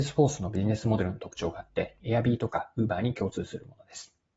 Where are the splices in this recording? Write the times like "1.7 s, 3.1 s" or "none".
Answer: 2.0 s